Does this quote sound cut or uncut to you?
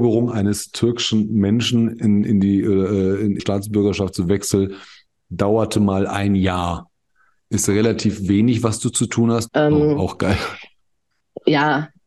cut